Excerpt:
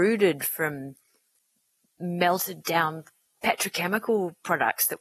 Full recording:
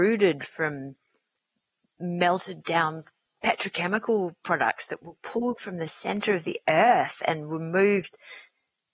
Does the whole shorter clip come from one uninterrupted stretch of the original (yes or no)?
yes